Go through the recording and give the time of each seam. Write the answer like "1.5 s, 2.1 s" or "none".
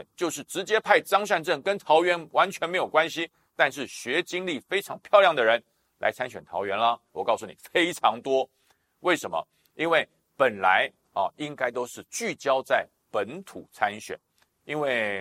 7.1 s